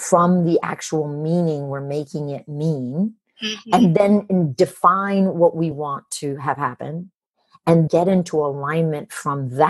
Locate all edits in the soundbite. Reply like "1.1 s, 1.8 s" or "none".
5.7 s, 7.9 s